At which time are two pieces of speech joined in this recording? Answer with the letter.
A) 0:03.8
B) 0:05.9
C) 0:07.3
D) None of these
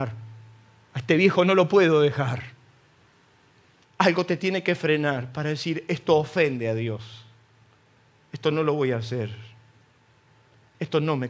A